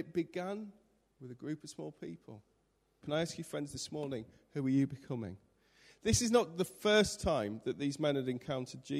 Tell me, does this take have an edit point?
yes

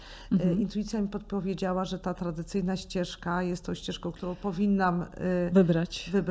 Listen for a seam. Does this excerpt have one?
no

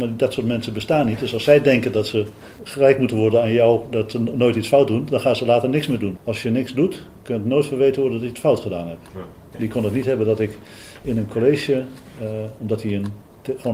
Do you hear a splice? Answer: yes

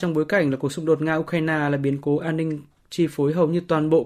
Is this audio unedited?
yes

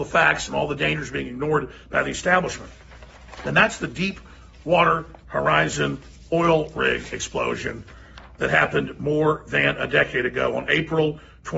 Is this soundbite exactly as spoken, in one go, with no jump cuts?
yes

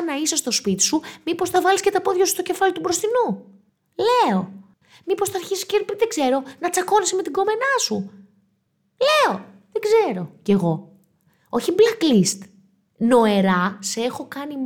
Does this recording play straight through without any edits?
yes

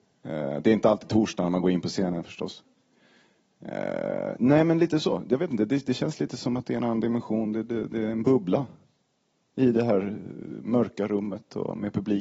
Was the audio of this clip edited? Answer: no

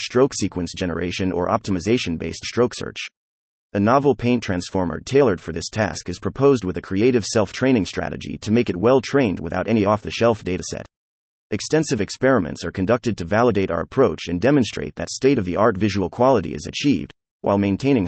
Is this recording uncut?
yes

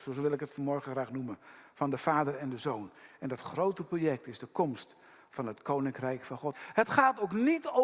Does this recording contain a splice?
yes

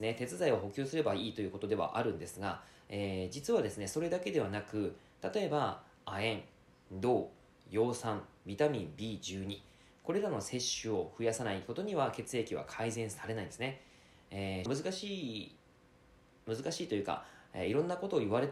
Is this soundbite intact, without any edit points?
no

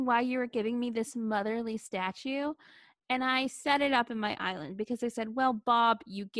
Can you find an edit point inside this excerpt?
no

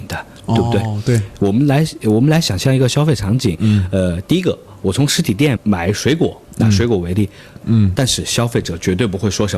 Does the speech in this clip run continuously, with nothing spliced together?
no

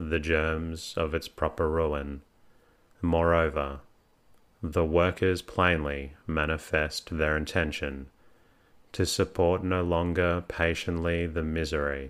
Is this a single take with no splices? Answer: no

